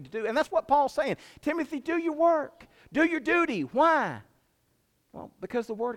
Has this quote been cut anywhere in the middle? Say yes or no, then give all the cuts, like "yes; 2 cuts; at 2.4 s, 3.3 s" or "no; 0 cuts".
no; 0 cuts